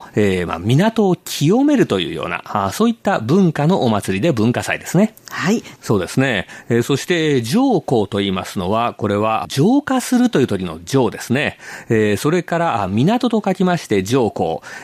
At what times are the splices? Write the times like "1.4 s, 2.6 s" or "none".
5.8 s